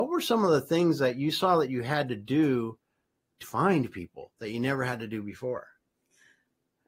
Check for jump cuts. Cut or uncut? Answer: cut